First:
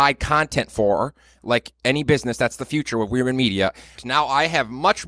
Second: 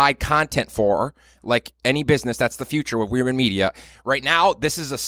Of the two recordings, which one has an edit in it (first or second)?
first